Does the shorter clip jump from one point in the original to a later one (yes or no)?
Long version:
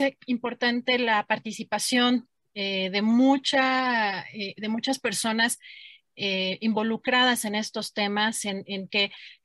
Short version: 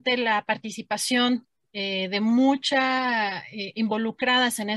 yes